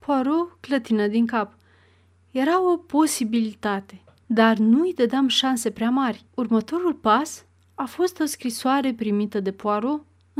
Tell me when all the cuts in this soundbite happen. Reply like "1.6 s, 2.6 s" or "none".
4.2 s, 6.3 s